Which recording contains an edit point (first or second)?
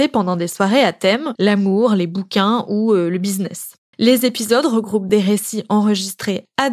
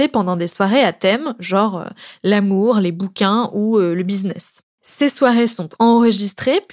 first